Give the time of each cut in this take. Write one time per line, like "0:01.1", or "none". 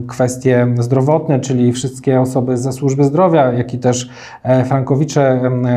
0:01.7

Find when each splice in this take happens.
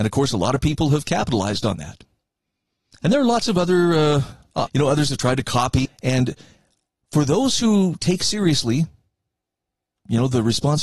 0:04.7
0:05.9

